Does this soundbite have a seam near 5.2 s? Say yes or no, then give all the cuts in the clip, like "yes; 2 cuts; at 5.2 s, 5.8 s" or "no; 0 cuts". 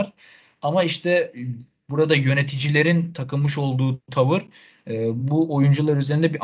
no; 0 cuts